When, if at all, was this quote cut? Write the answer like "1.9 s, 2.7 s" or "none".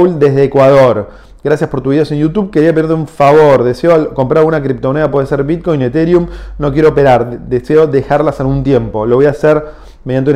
none